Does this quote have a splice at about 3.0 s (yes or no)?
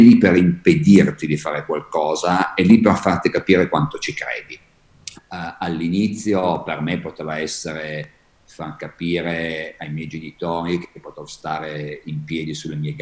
no